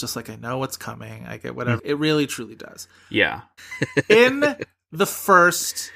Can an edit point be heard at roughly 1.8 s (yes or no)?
yes